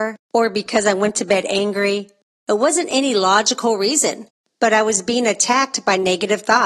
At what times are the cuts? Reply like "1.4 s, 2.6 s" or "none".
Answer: none

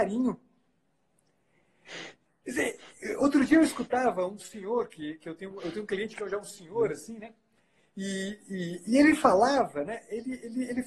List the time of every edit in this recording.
none

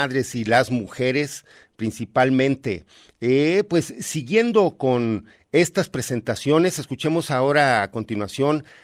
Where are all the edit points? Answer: none

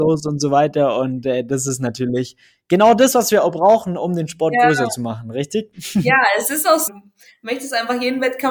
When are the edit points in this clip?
6.9 s

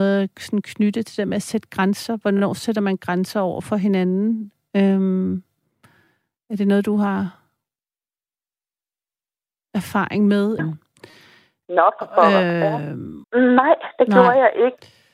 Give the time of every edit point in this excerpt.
10.6 s, 13.2 s

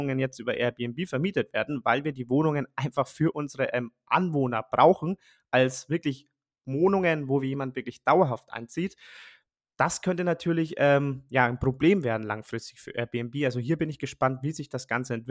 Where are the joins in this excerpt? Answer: none

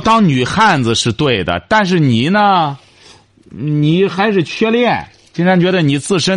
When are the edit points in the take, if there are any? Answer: none

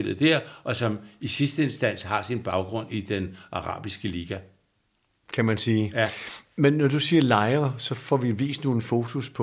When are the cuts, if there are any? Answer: 5.2 s

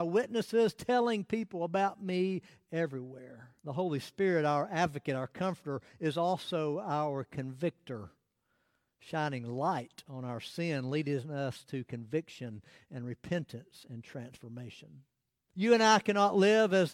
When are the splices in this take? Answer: 3.6 s, 15.5 s

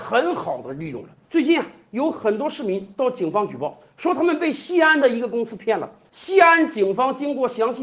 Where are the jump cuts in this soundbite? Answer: none

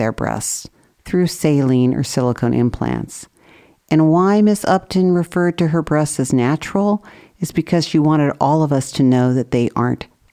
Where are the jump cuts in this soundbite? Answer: none

